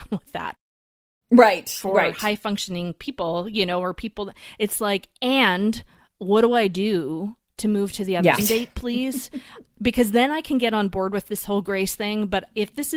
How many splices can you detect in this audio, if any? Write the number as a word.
one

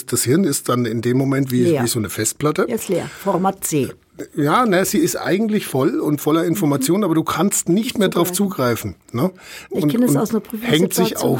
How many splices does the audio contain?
one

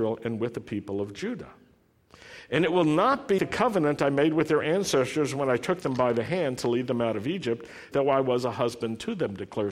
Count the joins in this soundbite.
two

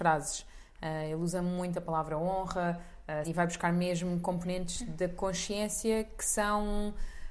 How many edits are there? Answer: one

